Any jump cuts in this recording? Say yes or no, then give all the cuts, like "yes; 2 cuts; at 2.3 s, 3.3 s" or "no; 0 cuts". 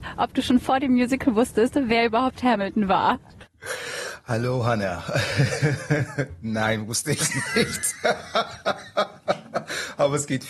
no; 0 cuts